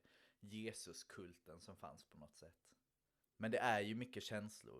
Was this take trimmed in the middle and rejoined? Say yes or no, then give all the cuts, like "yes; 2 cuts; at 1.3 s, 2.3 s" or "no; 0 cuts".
yes; 1 cut; at 3.3 s